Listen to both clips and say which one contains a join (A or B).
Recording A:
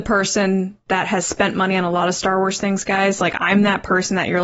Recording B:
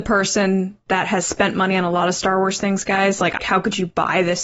B